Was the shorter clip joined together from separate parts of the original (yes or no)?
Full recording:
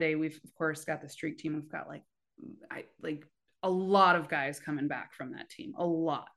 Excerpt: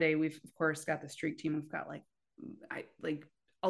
no